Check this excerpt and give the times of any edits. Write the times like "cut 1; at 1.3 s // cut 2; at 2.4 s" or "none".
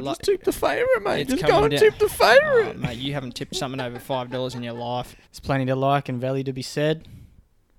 cut 1; at 5.2 s

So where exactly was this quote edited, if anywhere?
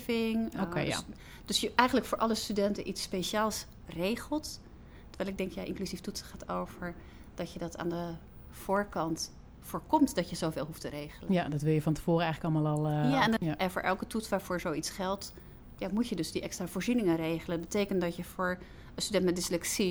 cut 1; at 13.4 s // cut 2; at 15.8 s

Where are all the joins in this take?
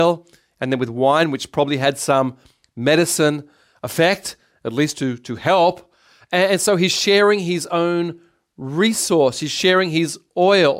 none

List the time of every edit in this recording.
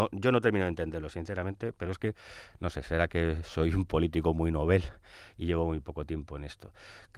none

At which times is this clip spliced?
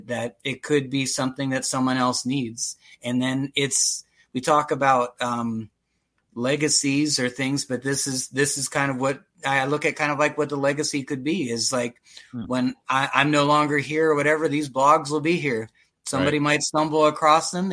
none

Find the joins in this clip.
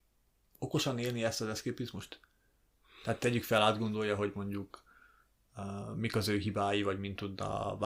none

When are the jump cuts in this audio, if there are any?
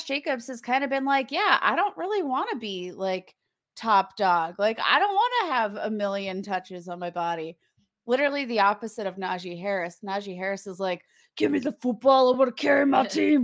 none

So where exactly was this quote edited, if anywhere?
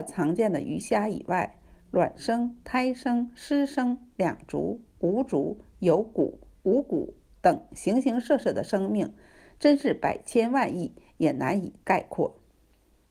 cut 1; at 4.9 s

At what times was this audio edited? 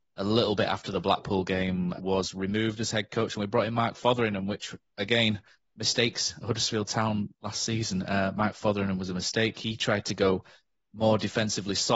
cut 1; at 2.0 s

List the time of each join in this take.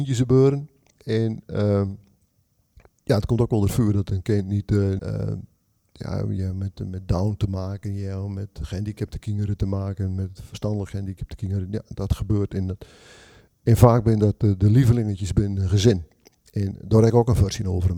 cut 1; at 5.0 s

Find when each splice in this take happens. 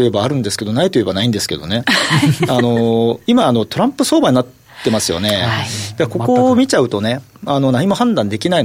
none

